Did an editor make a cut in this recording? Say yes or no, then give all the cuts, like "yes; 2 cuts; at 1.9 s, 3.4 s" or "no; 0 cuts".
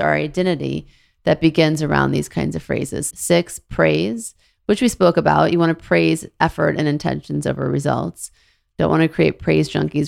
yes; 1 cut; at 3.1 s